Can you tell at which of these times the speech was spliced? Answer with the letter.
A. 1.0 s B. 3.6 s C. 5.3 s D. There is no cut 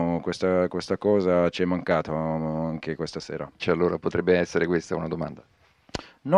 B